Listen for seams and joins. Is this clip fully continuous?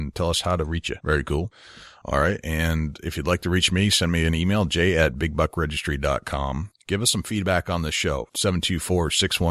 no; 1 cut; at 1.0 s

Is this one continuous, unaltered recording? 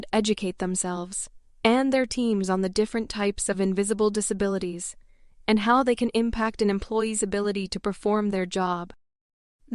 yes; 0 cuts

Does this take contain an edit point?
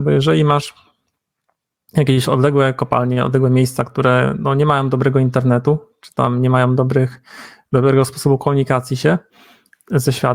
no; 0 cuts

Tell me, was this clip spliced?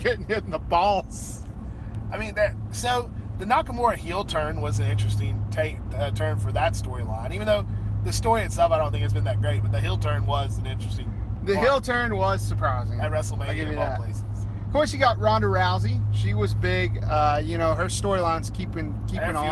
no; 0 cuts

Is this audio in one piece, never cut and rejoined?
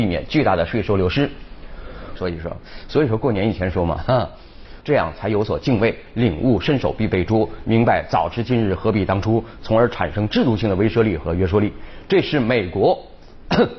no; 2 cuts; at 2.2 s, 4.8 s

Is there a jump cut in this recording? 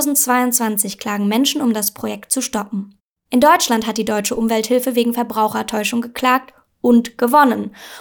no; 0 cuts

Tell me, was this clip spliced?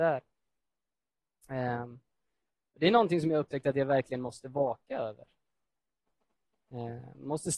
no; 0 cuts

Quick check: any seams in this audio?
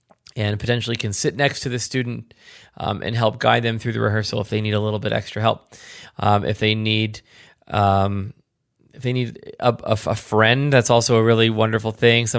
no; 0 cuts

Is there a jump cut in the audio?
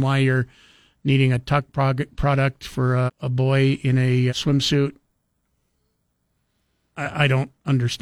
yes; 2 cuts; at 3.1 s, 4.3 s

